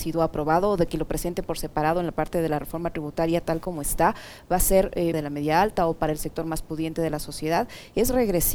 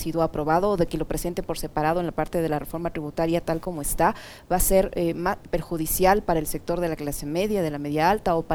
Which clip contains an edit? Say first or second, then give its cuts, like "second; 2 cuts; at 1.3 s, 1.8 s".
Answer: first; 1 cut; at 5.1 s